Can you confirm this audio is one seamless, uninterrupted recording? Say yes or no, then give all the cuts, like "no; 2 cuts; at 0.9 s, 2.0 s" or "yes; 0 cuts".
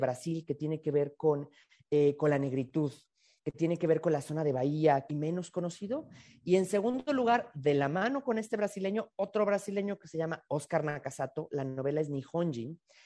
no; 1 cut; at 5.1 s